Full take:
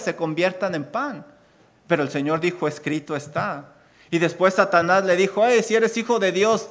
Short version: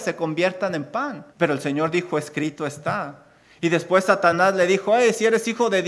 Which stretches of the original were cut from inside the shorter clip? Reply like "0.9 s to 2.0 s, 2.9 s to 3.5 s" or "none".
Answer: 1.3 s to 1.8 s